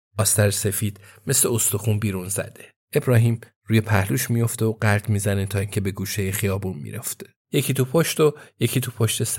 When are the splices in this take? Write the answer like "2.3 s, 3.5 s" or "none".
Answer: 2.8 s, 7.4 s